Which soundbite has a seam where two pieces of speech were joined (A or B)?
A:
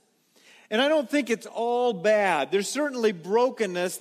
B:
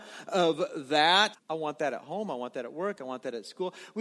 B